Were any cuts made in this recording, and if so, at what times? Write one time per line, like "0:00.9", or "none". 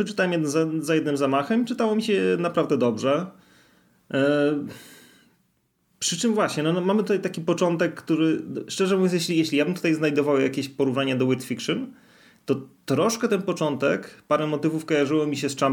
none